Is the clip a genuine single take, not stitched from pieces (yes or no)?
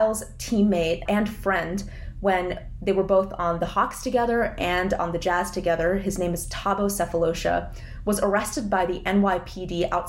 no